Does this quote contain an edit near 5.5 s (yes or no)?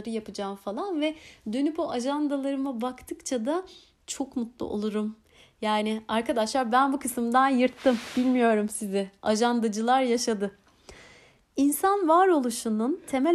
no